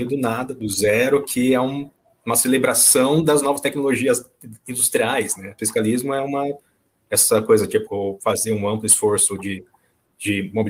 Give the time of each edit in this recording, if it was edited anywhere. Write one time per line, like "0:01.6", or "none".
0:05.6
0:07.9